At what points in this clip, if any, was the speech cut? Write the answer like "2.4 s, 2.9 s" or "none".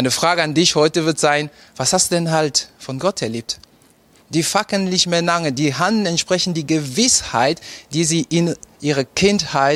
4.1 s

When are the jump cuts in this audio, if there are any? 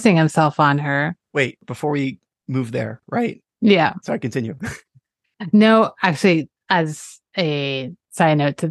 3.5 s

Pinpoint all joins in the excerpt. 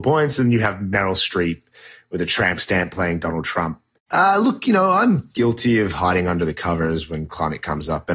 4.0 s

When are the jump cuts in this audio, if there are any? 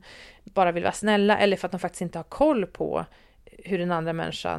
none

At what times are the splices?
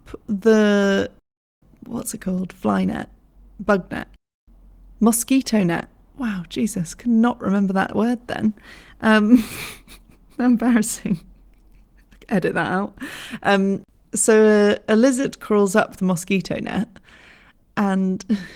none

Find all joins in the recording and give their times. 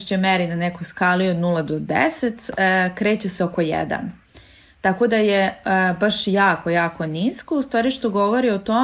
none

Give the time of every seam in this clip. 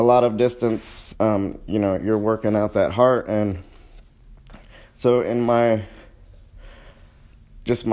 1.1 s

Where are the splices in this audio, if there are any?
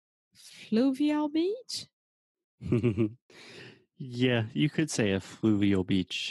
none

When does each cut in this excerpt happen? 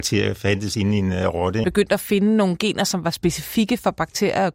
1.6 s

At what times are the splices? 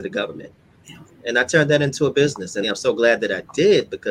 2.6 s

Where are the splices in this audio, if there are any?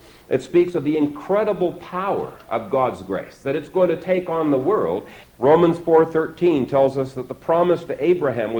5.2 s

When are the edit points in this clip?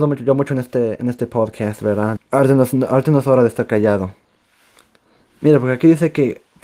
2.2 s

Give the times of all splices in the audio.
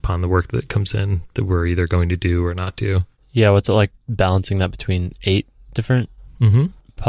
none

